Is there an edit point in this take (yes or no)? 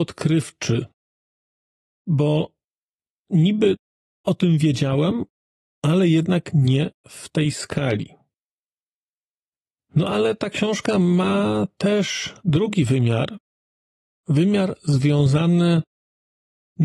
no